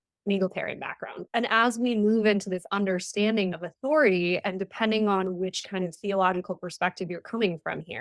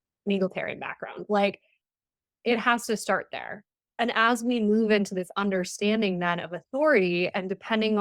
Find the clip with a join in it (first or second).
first